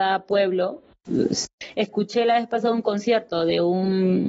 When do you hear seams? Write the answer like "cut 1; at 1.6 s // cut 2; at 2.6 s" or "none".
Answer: none